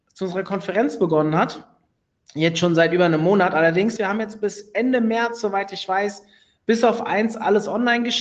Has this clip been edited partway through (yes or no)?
yes